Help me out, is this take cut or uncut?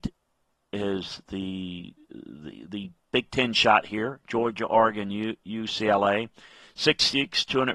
uncut